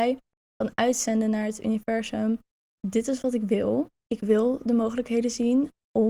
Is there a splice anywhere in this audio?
yes; 2 cuts; at 2.8 s, 4.0 s

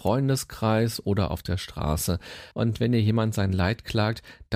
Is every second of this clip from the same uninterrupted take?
no; 1 cut; at 2.5 s

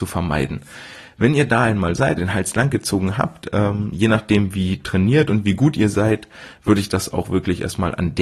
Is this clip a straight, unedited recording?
no; 1 cut; at 2.2 s

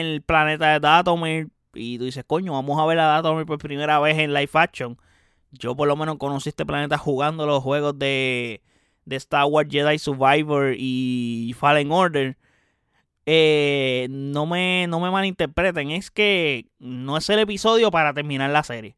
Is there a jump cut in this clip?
yes; 1 cut; at 13.2 s

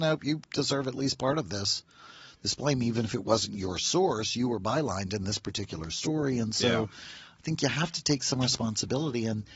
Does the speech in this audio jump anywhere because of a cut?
no; 0 cuts

